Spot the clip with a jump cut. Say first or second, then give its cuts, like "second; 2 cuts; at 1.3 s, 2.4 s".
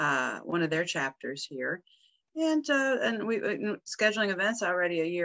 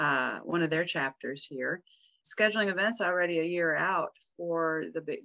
second; 1 cut; at 2.2 s